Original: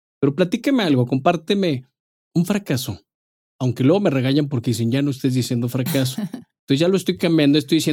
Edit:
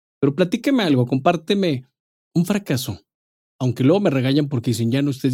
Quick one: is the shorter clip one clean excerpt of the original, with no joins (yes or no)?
yes